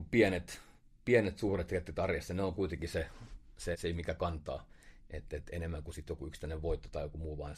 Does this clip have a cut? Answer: no; 0 cuts

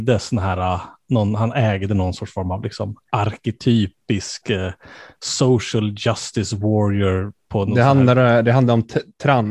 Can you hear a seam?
no; 0 cuts

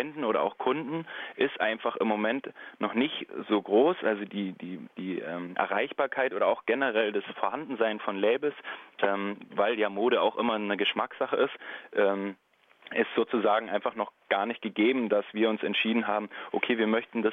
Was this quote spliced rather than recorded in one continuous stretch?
no; 0 cuts

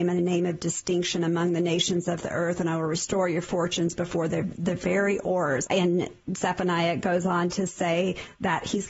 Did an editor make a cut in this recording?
yes; 1 cut; at 5.7 s

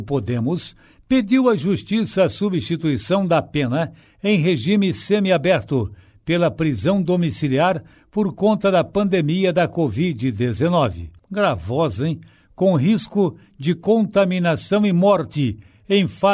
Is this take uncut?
no; 1 cut; at 11.2 s

